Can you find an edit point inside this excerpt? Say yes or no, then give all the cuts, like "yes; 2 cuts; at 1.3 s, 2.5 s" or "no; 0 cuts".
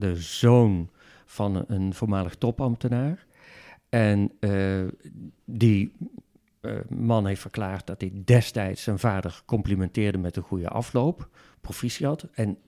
yes; 1 cut; at 5.4 s